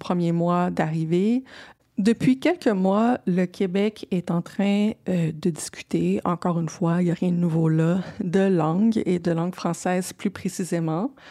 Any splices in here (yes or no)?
yes